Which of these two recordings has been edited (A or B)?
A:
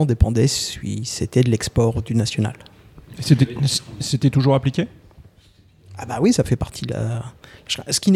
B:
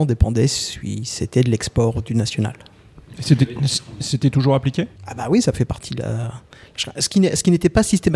B